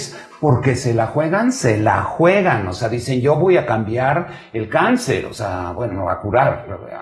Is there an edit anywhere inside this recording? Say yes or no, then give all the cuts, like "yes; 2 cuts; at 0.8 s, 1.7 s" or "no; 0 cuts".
no; 0 cuts